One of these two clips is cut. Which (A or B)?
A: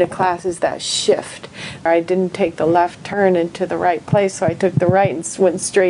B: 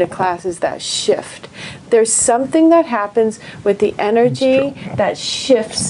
A